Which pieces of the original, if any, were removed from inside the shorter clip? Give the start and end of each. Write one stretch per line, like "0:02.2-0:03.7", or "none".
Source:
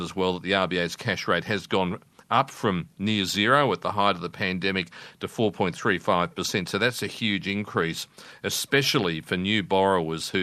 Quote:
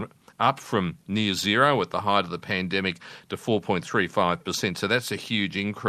none